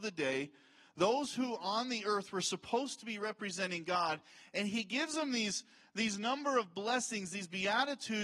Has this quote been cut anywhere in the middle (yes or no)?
no